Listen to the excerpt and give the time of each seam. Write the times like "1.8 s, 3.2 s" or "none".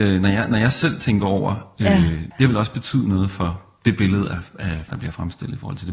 2.3 s, 4.9 s